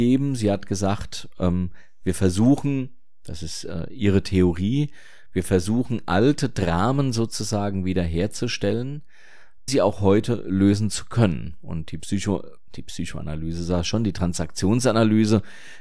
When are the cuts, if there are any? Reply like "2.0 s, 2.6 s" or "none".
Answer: 9.7 s